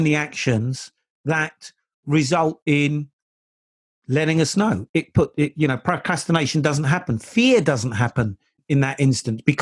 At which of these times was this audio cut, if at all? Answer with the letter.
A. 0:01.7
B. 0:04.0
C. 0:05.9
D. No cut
D